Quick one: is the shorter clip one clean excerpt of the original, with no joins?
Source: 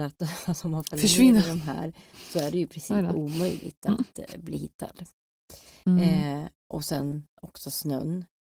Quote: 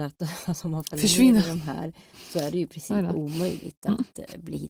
yes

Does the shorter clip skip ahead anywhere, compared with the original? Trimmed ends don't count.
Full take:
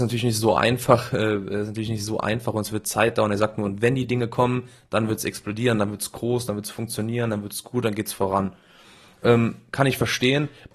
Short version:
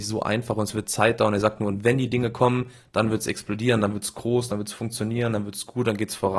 no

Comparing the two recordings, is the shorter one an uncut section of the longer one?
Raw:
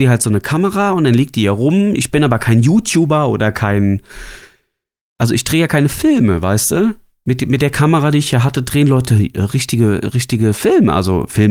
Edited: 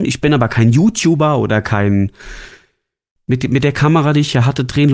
no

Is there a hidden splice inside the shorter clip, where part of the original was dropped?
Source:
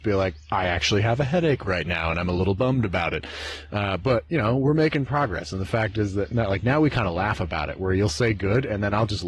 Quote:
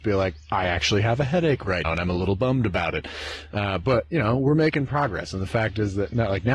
yes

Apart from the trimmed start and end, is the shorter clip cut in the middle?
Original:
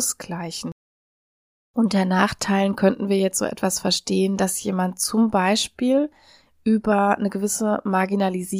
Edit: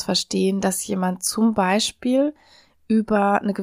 no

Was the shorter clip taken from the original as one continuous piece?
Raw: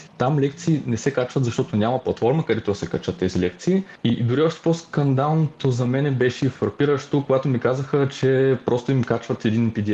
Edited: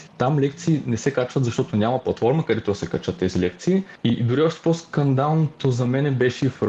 yes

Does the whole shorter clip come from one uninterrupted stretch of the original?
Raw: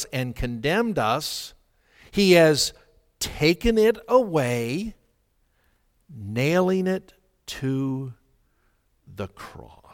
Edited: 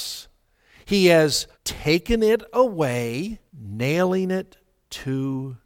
no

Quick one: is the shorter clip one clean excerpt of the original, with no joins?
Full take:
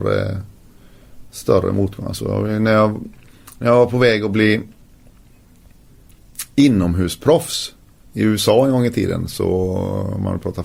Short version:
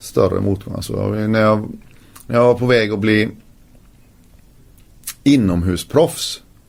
yes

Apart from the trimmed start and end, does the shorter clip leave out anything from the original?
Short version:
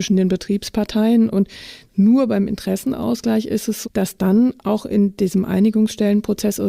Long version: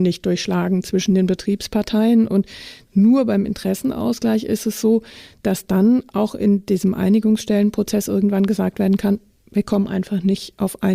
yes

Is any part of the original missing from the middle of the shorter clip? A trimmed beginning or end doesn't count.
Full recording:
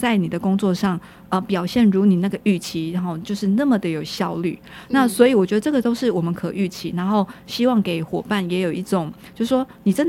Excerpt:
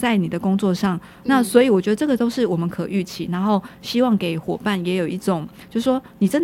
yes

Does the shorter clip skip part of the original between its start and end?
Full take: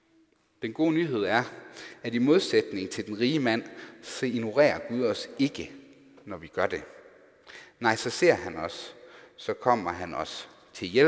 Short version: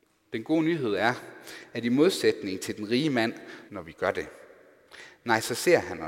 yes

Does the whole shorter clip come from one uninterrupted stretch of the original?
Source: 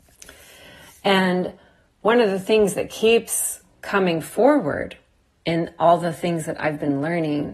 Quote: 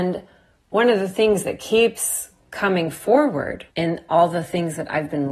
no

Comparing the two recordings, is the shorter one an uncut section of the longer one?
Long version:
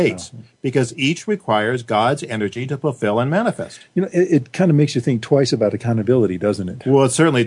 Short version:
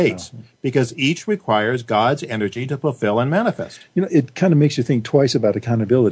no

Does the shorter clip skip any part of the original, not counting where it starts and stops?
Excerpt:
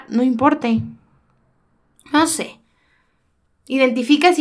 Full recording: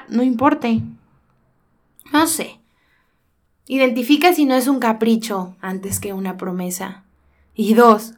no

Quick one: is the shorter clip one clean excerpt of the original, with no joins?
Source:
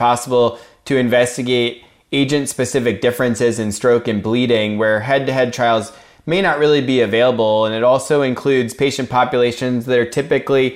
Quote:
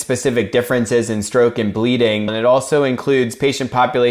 no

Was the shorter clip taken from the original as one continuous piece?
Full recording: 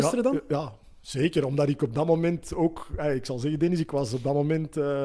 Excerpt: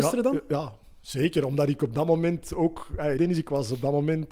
no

